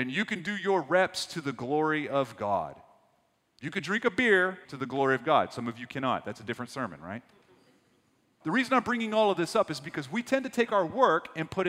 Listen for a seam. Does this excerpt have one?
yes; 2 cuts; at 4.6 s, 8.4 s

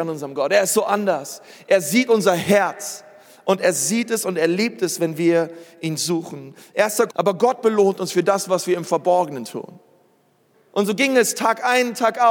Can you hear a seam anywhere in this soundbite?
yes; 2 cuts; at 7.1 s, 10.5 s

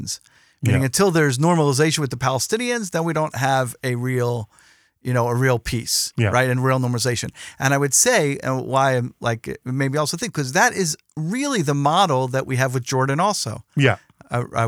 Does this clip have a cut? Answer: no; 0 cuts

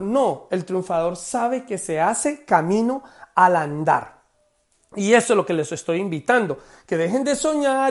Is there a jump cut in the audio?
no; 0 cuts

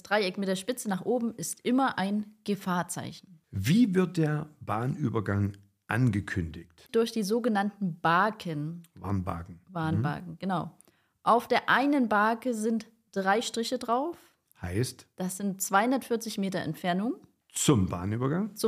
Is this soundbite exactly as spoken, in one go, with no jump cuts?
yes; 0 cuts

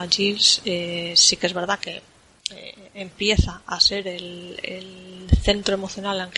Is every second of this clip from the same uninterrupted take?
yes; 0 cuts

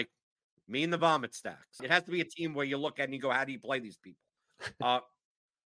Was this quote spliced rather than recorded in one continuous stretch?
yes; 1 cut; at 1.8 s

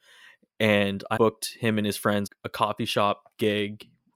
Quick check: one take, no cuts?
no; 2 cuts; at 1.2 s, 2.3 s

